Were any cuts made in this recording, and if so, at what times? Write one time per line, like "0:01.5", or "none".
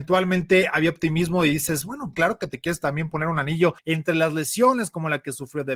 0:02.1
0:03.8